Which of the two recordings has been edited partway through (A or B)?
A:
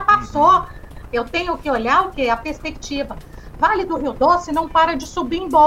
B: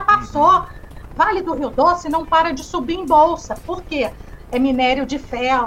B